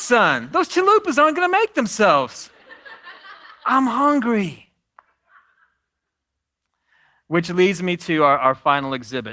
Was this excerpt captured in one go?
yes; 0 cuts

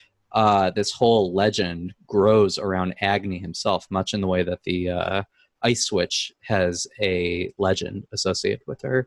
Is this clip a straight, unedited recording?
yes; 0 cuts

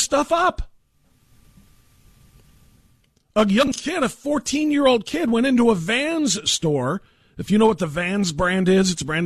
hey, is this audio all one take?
yes; 0 cuts

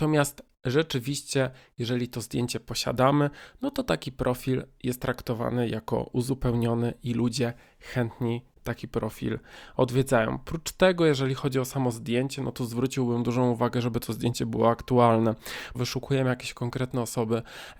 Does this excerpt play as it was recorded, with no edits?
no; 1 cut; at 15.7 s

